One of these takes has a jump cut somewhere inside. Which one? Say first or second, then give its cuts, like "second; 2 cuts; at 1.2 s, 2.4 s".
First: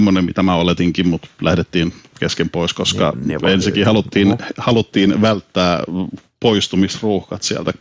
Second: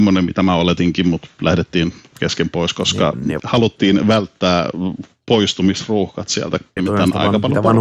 second; 2 cuts; at 3.4 s, 6.8 s